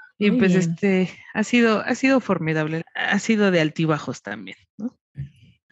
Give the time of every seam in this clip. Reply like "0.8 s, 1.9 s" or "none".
2.8 s